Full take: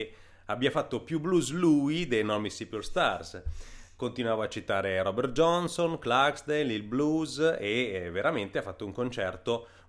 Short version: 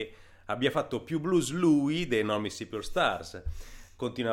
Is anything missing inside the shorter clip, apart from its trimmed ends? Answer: no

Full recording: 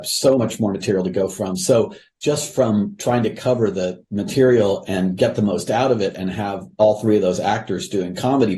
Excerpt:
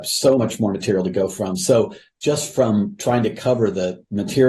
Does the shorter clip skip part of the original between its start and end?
no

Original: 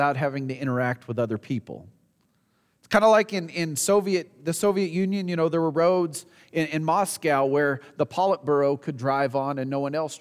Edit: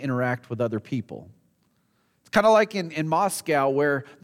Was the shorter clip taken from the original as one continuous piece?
no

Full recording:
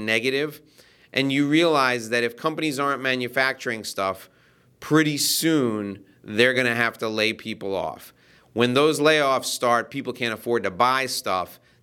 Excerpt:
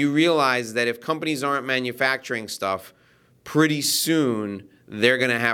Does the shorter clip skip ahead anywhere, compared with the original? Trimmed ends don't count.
no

